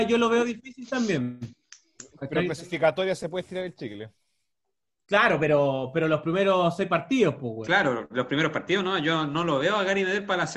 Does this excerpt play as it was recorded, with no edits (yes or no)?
no